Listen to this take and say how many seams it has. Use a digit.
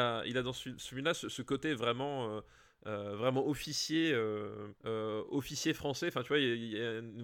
1